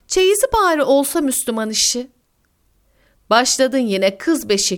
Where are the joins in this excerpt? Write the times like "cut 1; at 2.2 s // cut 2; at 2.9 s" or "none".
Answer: none